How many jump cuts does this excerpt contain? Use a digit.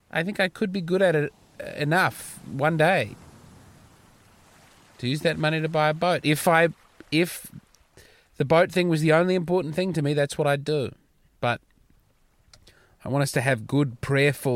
0